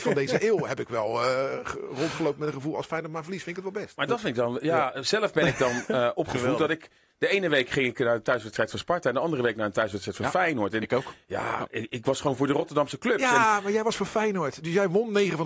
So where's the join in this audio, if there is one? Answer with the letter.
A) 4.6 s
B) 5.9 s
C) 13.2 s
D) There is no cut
D